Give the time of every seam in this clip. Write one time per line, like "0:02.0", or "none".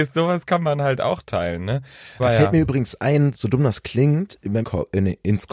0:02.2
0:04.6